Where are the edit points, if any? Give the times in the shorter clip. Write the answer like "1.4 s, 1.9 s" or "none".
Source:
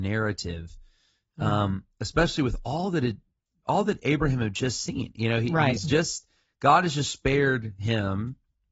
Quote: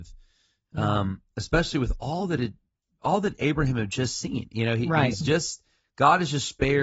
none